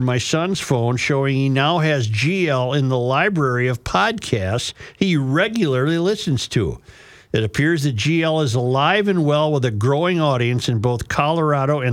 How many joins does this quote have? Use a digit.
0